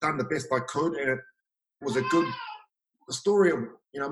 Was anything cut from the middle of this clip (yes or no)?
no